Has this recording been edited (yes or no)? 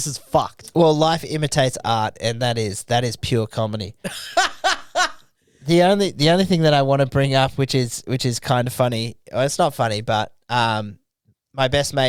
no